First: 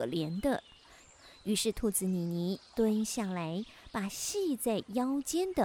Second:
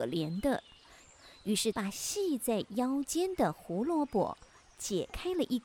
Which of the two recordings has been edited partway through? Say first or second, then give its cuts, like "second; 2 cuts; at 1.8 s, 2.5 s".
second; 1 cut; at 1.7 s